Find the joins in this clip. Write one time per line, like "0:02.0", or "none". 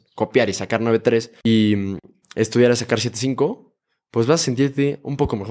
none